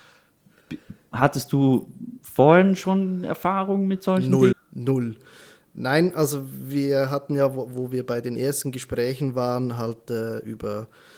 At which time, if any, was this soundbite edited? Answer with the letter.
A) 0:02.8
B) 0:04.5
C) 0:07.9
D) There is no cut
B